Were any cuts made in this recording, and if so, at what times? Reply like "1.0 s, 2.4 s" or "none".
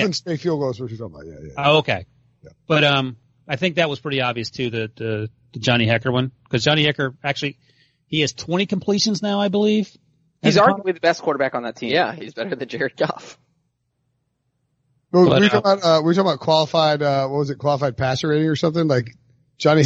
none